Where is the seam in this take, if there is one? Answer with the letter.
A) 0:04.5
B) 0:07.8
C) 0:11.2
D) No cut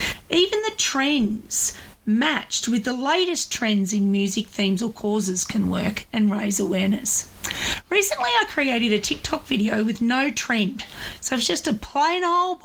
D